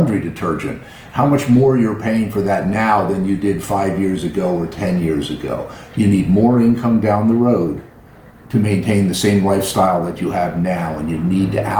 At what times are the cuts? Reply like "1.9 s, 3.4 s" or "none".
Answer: none